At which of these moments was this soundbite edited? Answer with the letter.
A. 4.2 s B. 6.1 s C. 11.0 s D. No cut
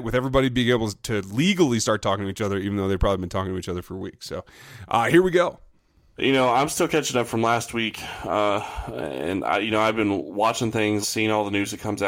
C